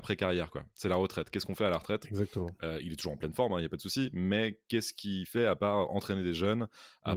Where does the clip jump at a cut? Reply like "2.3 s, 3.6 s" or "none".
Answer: none